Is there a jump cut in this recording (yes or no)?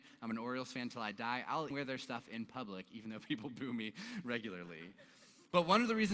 yes